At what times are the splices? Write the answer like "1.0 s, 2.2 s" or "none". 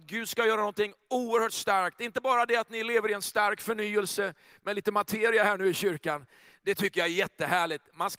none